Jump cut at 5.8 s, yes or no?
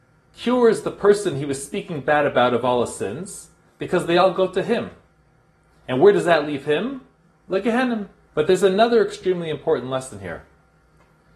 no